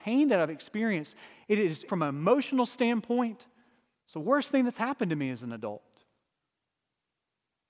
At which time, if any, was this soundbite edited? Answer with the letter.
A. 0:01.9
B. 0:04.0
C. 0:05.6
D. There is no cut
A